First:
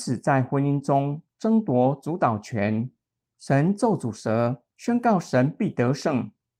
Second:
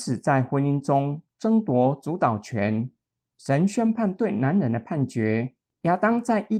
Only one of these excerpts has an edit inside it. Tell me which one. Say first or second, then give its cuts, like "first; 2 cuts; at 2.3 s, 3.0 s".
first; 1 cut; at 3.2 s